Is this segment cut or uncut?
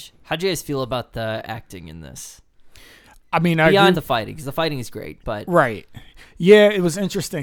cut